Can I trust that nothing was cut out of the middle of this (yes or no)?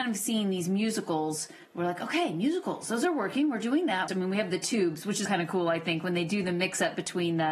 no